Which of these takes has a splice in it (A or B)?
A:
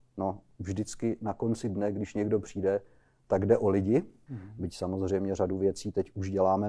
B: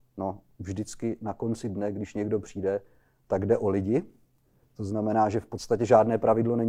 A